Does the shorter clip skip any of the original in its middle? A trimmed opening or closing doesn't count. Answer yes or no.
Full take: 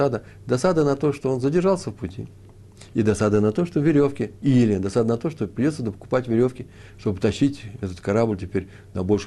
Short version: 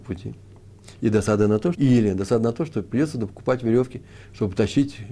yes